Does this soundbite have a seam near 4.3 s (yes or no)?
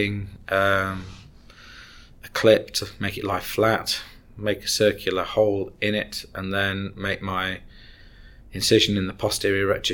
no